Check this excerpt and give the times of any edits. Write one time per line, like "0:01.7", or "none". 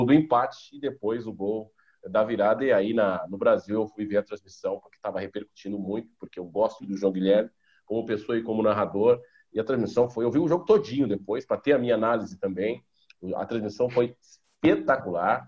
0:06.8